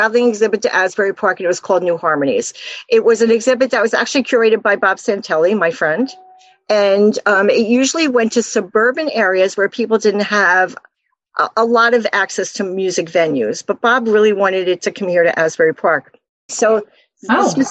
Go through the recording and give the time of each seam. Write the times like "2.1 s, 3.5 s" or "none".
16.5 s

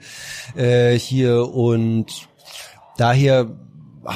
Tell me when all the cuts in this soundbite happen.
none

